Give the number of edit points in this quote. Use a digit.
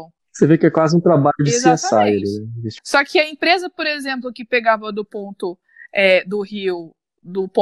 1